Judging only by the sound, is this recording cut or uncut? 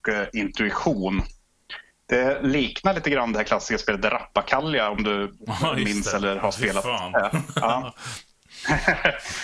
uncut